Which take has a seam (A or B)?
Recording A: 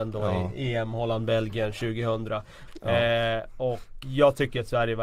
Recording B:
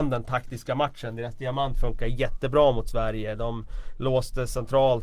A